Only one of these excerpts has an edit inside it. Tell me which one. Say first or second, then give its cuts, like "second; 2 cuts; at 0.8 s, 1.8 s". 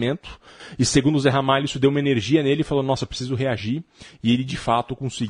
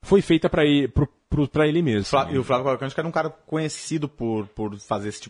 second; 1 cut; at 2.0 s